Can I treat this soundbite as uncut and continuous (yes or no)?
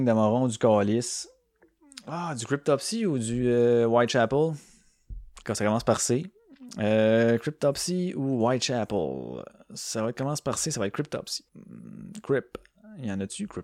no